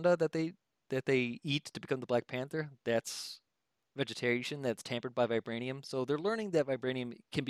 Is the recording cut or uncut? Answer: uncut